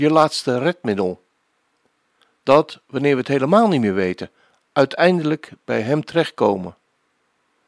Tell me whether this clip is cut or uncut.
uncut